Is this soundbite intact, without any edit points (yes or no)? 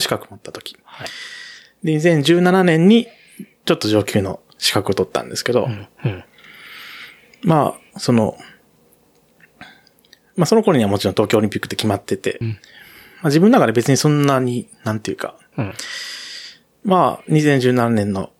no